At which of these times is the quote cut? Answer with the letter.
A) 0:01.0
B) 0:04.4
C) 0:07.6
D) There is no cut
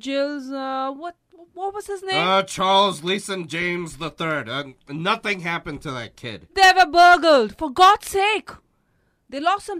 D